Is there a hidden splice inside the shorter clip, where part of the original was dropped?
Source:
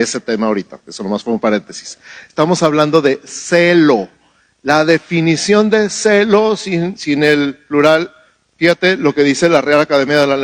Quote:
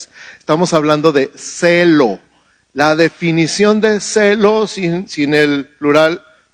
no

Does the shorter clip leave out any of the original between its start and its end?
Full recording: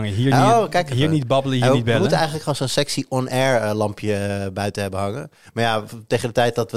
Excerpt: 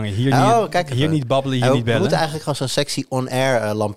no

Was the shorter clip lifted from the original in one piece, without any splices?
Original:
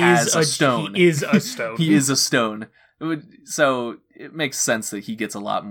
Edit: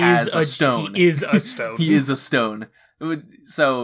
yes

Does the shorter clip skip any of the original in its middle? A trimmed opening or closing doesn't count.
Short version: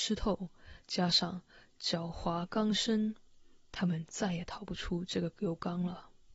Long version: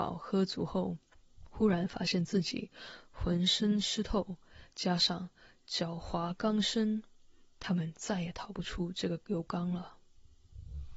no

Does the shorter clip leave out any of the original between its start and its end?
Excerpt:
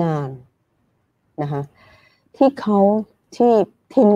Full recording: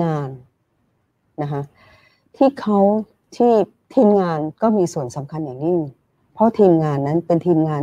no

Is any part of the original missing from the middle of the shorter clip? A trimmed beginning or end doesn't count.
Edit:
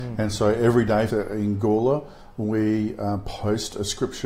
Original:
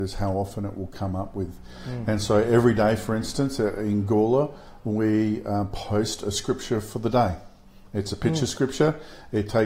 yes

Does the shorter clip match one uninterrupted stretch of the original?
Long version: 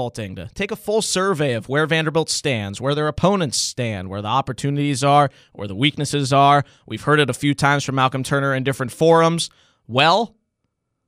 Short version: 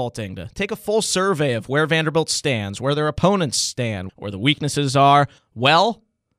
no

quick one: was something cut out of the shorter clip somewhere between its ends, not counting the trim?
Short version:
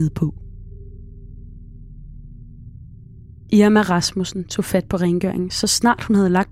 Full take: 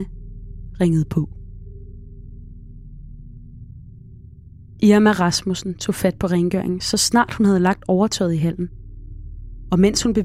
yes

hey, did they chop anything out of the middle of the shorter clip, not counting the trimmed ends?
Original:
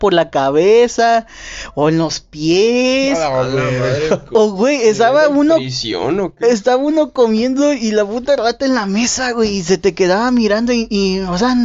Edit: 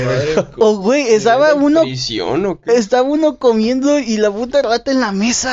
no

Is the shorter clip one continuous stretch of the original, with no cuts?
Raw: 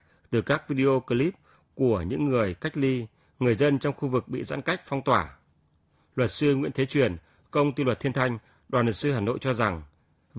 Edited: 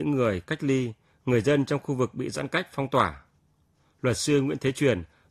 yes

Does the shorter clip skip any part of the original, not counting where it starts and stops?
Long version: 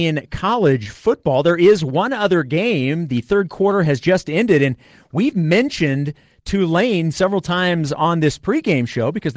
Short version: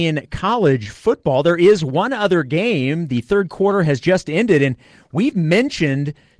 no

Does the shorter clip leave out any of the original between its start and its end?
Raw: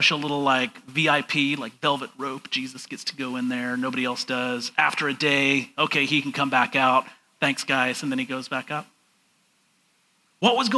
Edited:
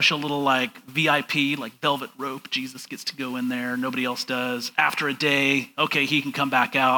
no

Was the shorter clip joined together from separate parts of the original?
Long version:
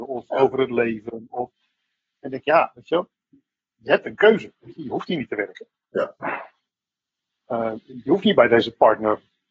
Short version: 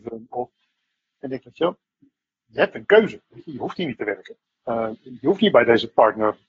yes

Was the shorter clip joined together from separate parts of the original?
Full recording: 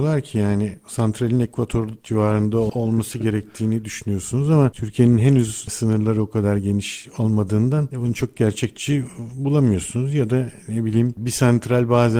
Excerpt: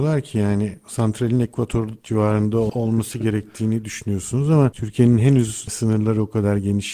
no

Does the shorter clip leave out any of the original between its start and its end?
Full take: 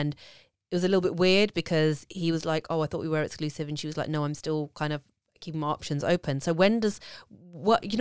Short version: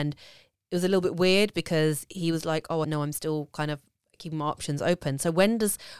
yes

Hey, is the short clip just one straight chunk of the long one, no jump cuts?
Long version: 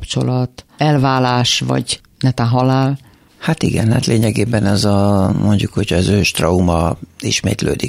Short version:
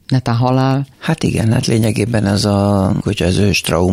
no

